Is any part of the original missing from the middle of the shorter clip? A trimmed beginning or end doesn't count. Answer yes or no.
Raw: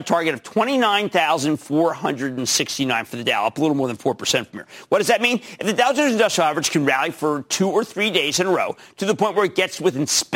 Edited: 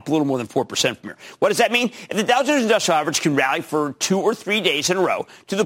no